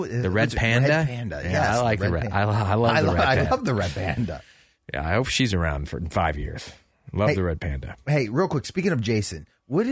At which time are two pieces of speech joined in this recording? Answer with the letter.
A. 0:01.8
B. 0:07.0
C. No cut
C